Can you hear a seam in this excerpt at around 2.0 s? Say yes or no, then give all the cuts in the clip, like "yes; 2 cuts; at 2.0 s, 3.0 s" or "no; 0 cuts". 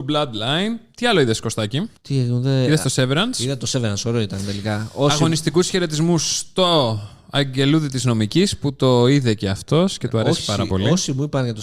yes; 1 cut; at 2.0 s